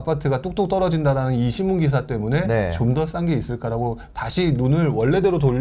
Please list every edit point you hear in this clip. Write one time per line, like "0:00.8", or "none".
none